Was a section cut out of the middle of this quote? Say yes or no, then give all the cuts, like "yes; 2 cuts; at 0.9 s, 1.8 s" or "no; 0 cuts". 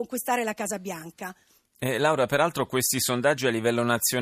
no; 0 cuts